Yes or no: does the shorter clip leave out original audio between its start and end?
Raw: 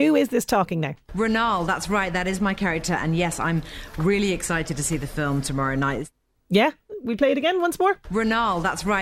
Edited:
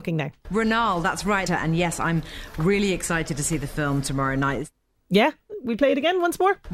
yes